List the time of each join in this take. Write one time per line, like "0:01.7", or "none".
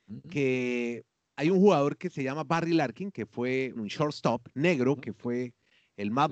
0:03.8